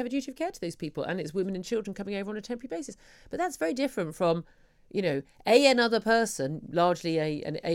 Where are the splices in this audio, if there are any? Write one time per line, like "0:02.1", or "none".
none

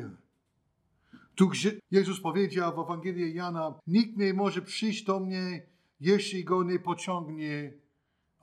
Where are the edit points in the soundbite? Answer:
0:01.8
0:03.8

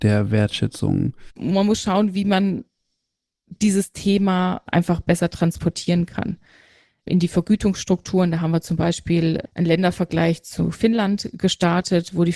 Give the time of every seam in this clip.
0:01.3
0:04.7

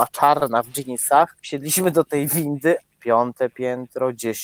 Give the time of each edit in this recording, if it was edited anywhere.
0:01.4
0:02.8

